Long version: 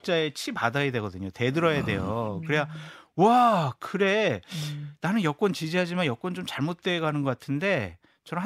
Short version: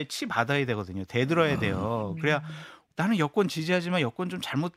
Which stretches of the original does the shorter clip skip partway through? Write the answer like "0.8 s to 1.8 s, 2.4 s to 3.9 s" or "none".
3.2 s to 5.0 s